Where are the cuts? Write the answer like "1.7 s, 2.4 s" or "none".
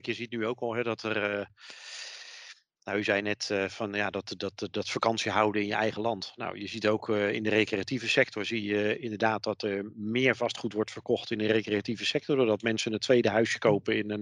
none